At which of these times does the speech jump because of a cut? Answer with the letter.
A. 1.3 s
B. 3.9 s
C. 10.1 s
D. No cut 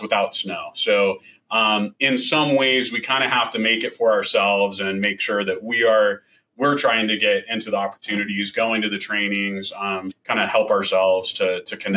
C